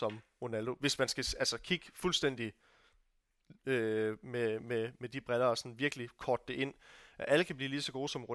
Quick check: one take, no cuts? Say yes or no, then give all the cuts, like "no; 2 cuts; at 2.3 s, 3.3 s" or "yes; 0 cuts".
yes; 0 cuts